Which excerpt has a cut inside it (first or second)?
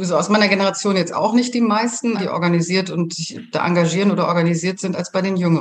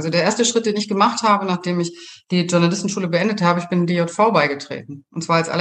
first